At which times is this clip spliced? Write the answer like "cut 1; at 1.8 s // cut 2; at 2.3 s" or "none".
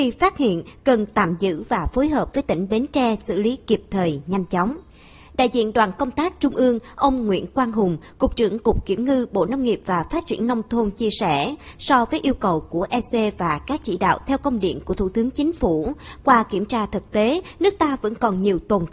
none